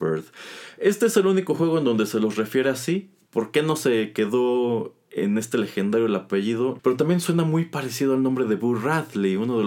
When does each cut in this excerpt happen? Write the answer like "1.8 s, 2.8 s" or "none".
3.3 s, 6.8 s